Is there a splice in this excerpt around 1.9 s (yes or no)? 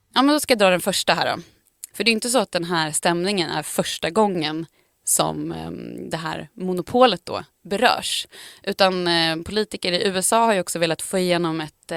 yes